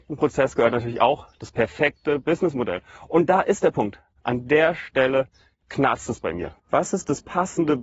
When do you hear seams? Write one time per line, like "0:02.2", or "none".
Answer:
0:06.6